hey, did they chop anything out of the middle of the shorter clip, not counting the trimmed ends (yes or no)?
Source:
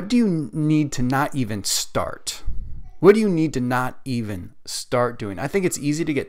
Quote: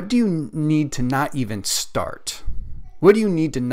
no